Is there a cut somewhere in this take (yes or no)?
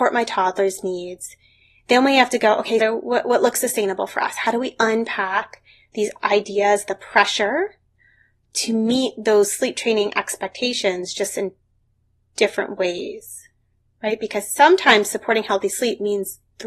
yes